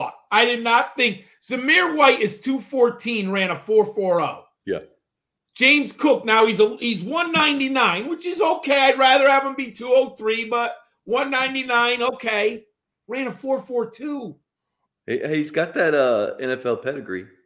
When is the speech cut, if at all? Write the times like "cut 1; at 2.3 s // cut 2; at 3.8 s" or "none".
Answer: none